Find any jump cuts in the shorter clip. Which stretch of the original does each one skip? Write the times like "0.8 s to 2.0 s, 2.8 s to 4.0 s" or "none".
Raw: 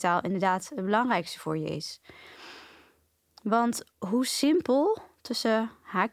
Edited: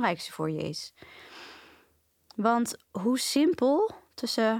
none